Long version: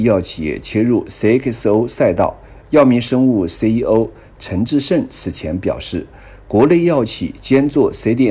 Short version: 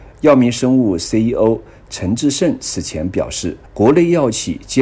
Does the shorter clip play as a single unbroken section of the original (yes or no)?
no